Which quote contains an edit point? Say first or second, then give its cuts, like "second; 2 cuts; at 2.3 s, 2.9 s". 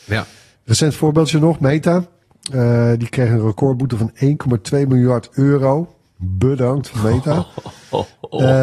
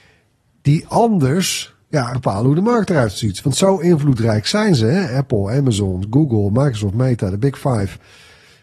second; 1 cut; at 2.1 s